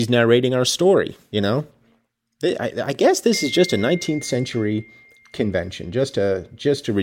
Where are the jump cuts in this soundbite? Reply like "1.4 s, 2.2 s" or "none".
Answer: none